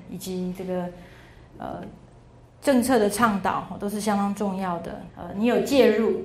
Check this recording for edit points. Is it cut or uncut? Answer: cut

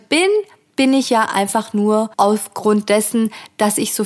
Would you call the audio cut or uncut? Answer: cut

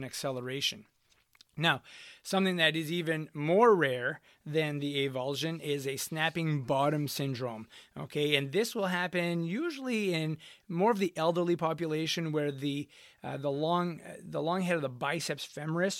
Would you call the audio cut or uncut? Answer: uncut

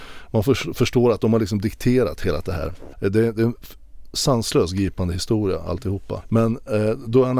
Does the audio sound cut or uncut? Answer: cut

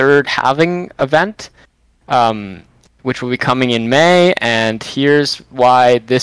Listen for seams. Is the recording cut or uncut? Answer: uncut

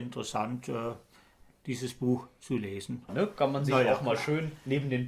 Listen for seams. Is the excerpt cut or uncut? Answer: cut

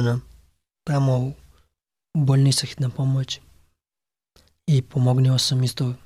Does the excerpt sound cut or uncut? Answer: uncut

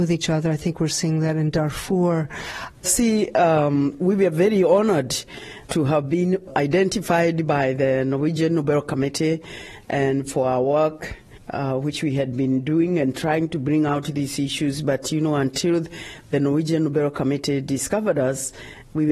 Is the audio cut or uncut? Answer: cut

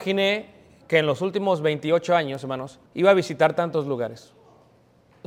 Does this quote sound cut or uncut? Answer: cut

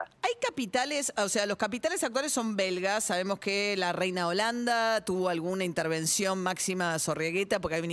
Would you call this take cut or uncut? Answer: uncut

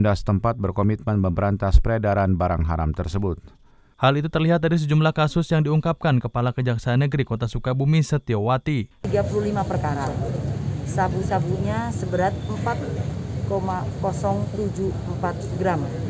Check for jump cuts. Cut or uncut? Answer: cut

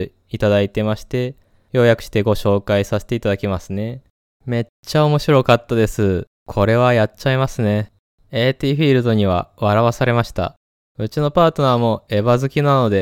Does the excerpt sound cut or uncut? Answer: uncut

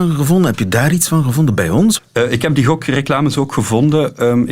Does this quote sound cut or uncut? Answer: cut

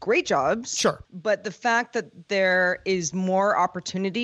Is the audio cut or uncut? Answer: cut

